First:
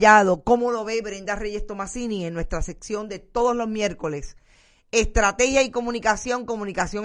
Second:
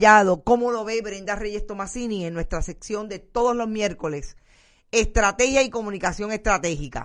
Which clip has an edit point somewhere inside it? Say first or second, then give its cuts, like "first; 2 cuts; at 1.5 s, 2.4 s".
second; 1 cut; at 5.7 s